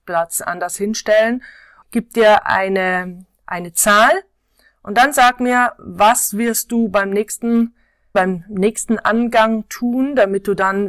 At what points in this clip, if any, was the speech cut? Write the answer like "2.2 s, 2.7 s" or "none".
1.8 s, 8.1 s